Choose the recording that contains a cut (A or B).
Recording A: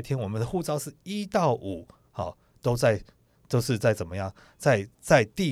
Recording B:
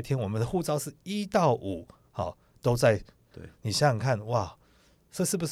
B